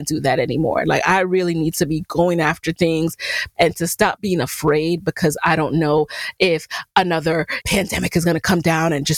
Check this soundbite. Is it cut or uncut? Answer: cut